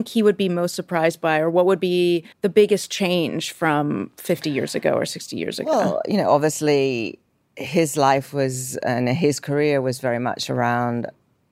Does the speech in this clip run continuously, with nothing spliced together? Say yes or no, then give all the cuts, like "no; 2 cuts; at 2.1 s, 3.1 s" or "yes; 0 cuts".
no; 1 cut; at 2.3 s